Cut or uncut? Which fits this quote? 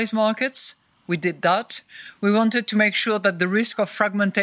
uncut